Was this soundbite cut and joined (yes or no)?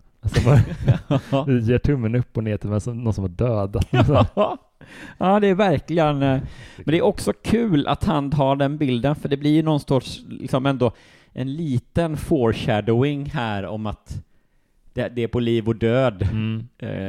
no